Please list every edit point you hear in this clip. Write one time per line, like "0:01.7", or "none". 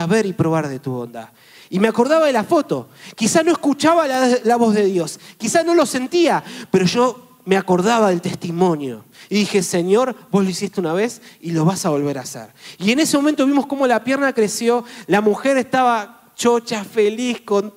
none